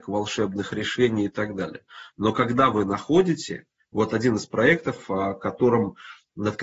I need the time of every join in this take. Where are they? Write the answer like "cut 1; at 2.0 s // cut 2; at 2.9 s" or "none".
none